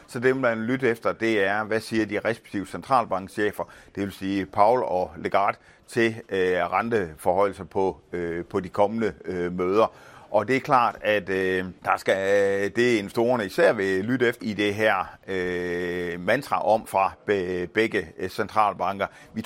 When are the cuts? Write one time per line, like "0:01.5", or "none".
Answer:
0:11.8
0:14.4
0:16.9